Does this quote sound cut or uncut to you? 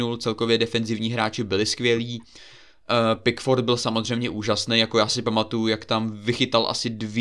uncut